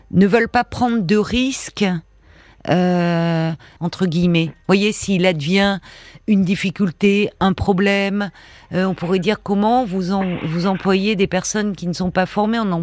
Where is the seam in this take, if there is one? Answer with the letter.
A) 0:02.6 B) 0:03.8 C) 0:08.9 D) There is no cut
B